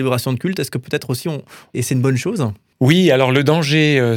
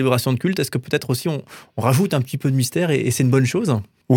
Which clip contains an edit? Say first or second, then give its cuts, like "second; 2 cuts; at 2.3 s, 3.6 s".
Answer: first; 1 cut; at 1.7 s